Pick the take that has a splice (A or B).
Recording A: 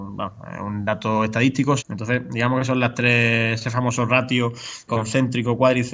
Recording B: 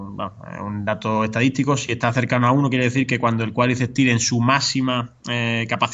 A